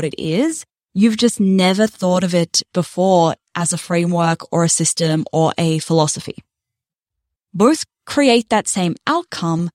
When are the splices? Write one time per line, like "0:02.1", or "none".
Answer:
0:07.4